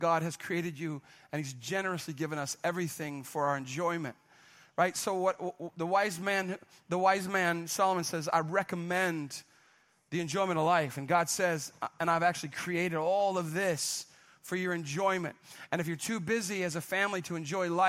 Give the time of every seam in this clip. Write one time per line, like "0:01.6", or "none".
none